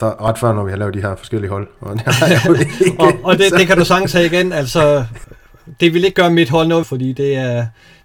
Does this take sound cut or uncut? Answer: cut